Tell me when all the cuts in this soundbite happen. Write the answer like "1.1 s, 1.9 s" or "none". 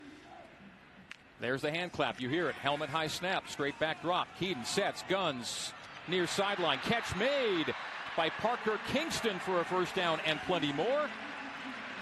none